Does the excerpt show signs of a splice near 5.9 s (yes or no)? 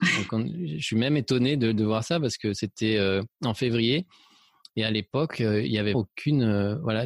yes